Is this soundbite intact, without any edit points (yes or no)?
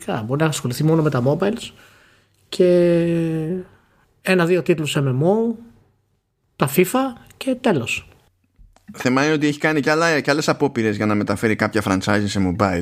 yes